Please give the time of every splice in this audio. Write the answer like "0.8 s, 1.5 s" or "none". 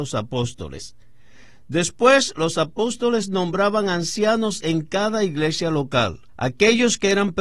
6.3 s